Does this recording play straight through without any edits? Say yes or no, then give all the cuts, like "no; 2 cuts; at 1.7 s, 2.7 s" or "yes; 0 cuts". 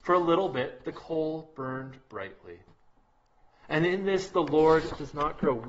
no; 1 cut; at 3.6 s